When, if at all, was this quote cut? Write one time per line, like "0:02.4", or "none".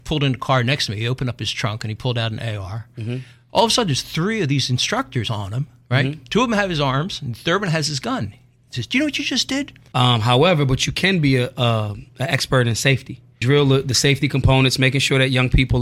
0:09.9
0:13.4